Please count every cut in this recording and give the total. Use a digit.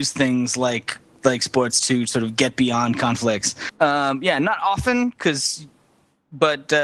1